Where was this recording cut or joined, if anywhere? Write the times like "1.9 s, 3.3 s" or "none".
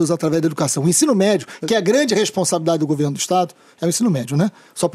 none

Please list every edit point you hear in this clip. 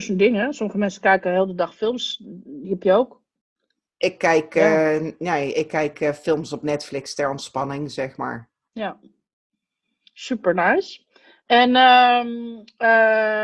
8.7 s

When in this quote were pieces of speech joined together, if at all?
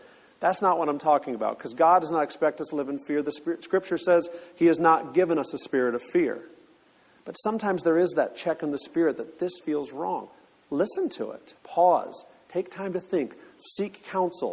9.6 s, 11.6 s

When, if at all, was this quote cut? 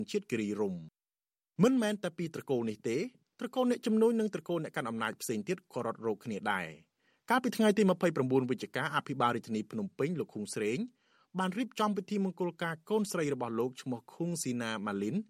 none

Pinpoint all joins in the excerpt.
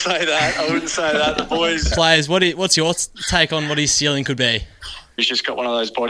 1.9 s, 5.2 s

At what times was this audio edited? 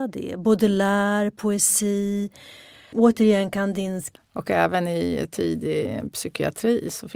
2.9 s, 4.2 s

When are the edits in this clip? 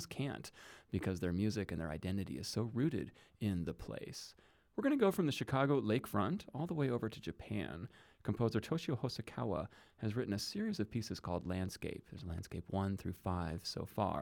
none

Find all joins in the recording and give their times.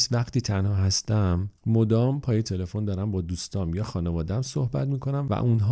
1.6 s

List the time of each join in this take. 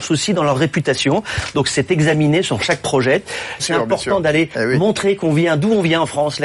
3.6 s

